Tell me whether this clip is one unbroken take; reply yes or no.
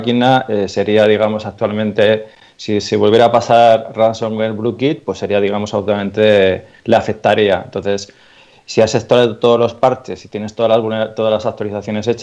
yes